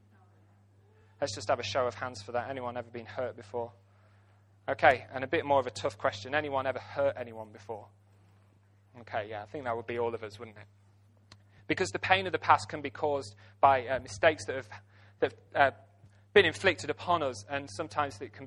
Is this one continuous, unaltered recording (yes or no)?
yes